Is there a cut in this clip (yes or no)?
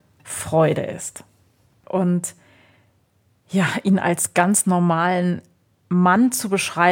yes